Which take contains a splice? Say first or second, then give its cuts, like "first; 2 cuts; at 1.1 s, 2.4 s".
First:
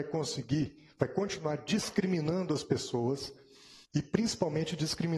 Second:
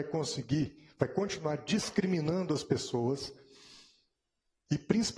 first; 1 cut; at 3.8 s